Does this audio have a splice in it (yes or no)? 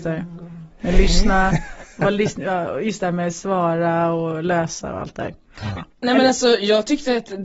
yes